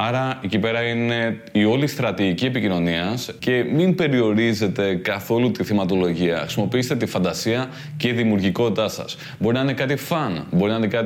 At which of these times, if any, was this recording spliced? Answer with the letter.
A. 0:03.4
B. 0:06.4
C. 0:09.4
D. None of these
A